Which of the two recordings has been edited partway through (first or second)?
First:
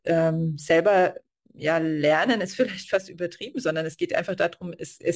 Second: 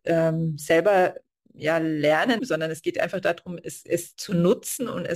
second